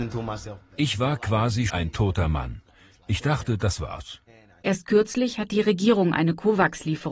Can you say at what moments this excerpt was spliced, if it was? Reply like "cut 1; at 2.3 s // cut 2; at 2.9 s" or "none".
cut 1; at 1.7 s // cut 2; at 4.6 s